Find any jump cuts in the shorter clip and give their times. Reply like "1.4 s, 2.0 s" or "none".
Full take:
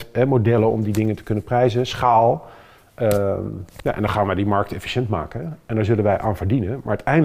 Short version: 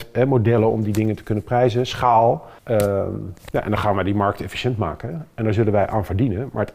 2.6 s